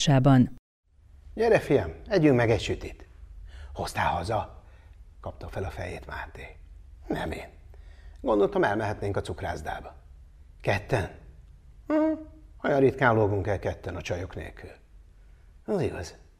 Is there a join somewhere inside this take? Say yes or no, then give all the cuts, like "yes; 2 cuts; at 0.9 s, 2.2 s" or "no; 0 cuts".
no; 0 cuts